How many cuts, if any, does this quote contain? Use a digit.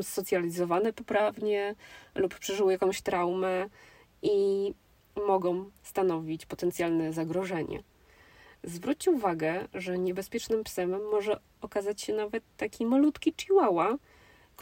0